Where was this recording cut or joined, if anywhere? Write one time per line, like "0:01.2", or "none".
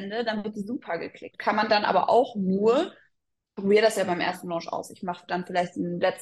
0:01.3